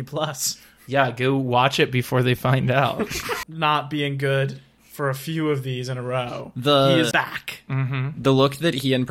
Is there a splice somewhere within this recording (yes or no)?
yes